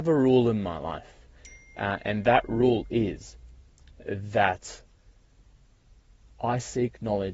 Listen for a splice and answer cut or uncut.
uncut